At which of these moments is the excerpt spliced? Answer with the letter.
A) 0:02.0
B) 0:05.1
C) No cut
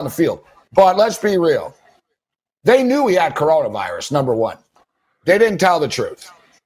C